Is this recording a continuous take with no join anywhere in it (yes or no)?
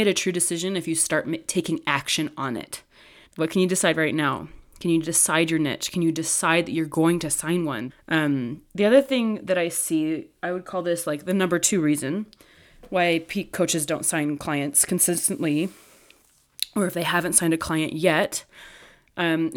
no